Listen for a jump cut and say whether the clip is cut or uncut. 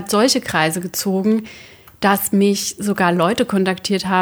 uncut